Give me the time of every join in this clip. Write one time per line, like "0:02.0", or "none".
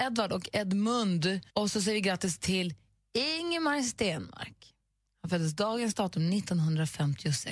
0:01.5